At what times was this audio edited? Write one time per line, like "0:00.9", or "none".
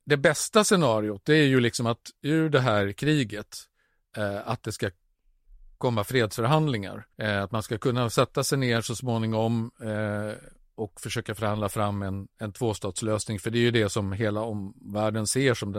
0:07.1